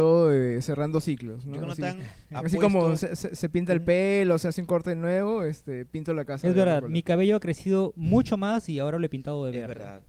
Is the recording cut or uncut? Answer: uncut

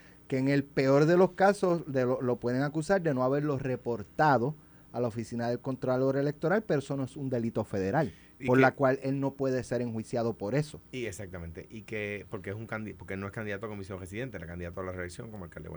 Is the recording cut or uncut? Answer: uncut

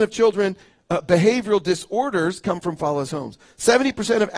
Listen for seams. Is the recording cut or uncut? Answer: cut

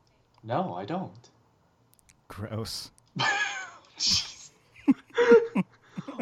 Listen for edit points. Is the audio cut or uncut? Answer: uncut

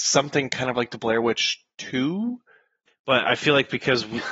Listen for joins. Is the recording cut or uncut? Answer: cut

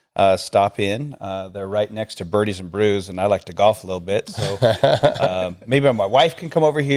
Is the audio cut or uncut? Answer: uncut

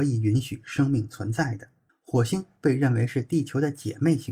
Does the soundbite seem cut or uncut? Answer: cut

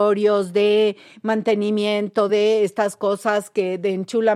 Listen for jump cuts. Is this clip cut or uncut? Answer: uncut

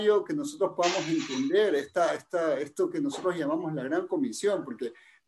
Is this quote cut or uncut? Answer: uncut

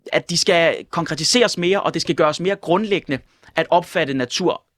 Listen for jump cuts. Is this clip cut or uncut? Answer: uncut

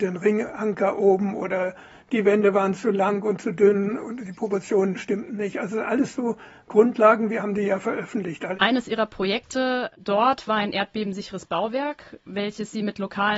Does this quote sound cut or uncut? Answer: cut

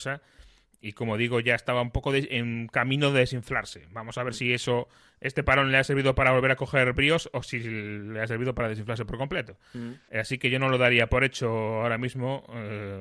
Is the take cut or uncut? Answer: uncut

